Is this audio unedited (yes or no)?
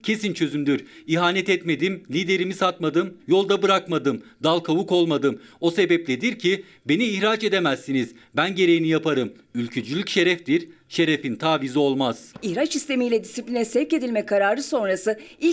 no